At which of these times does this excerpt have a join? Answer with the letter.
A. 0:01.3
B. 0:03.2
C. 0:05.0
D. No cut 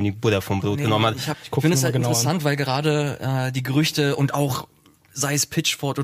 A